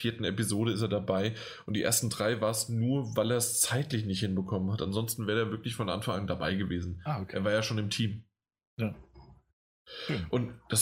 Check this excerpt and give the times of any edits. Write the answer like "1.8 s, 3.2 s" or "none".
none